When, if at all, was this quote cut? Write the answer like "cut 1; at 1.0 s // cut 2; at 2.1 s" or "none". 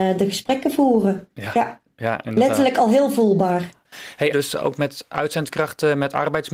cut 1; at 4.3 s

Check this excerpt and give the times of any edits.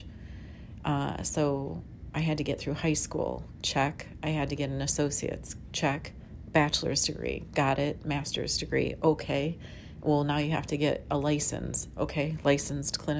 none

